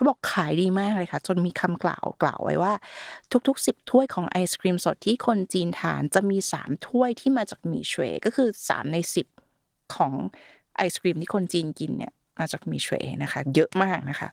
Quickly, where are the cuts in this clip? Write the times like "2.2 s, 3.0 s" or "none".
none